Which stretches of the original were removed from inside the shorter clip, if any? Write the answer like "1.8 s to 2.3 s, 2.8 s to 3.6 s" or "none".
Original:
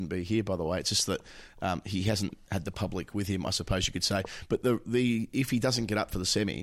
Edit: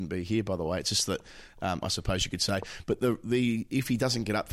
1.8 s to 3.4 s